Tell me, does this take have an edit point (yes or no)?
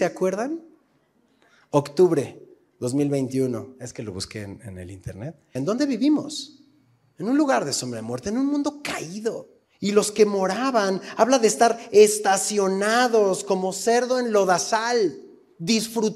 yes